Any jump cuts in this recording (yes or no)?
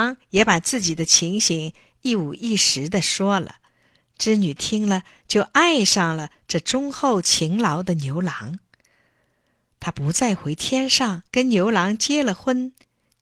yes